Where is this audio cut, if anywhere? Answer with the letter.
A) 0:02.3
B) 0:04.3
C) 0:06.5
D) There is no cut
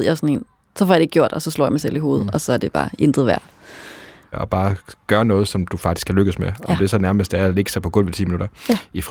B